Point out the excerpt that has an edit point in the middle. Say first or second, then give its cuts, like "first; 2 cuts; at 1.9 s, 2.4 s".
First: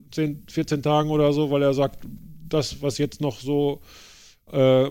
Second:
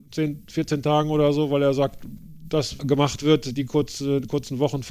second; 1 cut; at 2.8 s